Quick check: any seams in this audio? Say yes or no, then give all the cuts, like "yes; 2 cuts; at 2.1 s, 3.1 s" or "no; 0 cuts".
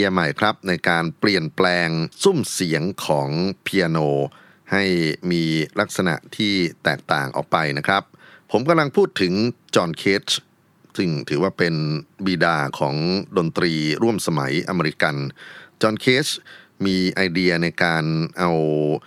yes; 1 cut; at 2.1 s